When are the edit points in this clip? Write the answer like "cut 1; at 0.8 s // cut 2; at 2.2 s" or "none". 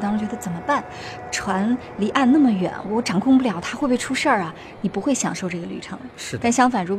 none

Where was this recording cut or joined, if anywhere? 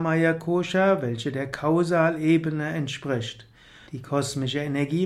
cut 1; at 3.9 s

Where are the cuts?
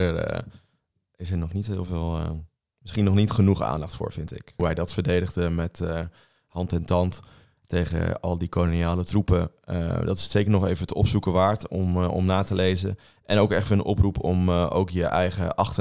cut 1; at 4.6 s

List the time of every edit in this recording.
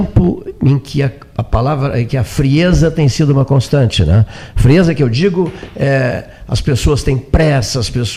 none

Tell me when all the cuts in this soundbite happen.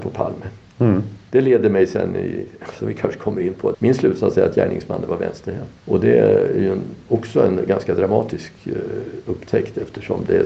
cut 1; at 3.7 s // cut 2; at 5.8 s

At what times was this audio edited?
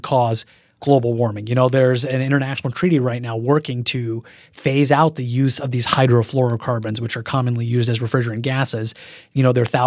none

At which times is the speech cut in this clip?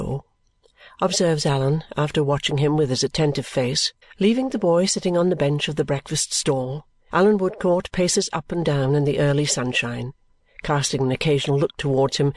cut 1; at 4.0 s // cut 2; at 7.1 s

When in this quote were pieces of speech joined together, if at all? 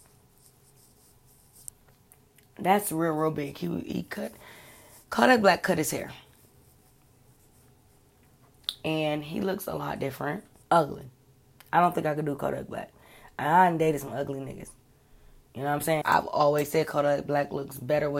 cut 1; at 10.6 s // cut 2; at 16.0 s

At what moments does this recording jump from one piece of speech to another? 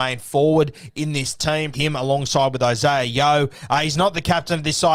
cut 1; at 1.7 s

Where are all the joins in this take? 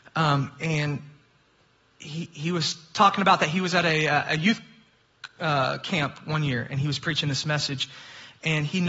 none

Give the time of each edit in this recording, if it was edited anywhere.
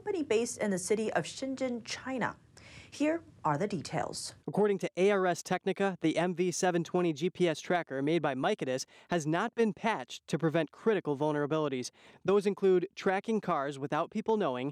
cut 1; at 4.4 s // cut 2; at 12.1 s

